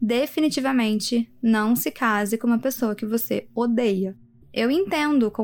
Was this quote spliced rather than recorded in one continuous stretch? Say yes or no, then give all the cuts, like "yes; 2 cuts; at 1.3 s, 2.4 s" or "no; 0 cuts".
yes; 1 cut; at 4.4 s